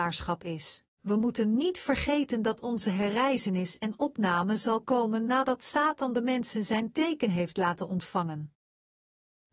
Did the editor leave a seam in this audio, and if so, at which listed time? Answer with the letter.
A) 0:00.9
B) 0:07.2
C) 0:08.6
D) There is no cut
A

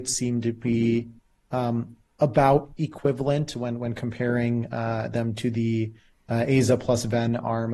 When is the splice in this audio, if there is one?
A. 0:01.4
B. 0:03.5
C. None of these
C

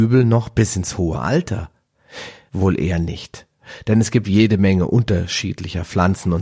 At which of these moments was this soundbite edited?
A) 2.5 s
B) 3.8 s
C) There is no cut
A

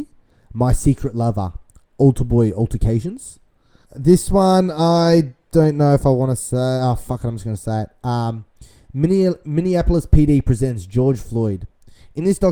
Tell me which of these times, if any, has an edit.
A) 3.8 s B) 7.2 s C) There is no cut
A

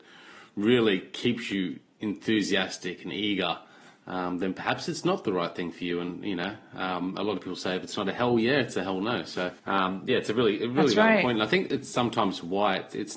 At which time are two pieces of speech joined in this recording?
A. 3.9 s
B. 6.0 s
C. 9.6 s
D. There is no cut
C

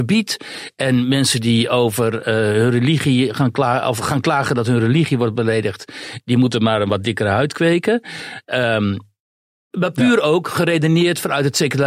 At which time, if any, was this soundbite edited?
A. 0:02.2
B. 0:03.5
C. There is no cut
C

